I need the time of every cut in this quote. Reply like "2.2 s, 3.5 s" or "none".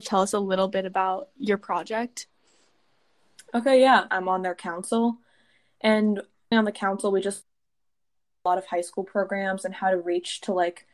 4.1 s, 6.5 s